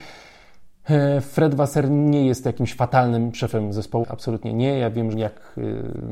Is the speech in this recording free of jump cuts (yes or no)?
no